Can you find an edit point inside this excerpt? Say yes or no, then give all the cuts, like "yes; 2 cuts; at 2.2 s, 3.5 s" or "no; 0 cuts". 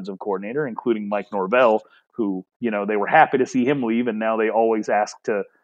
no; 0 cuts